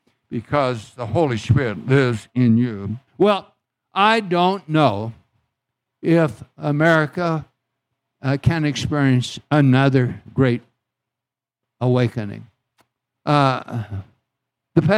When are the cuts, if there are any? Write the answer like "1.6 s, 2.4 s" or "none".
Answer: 3.1 s, 13.1 s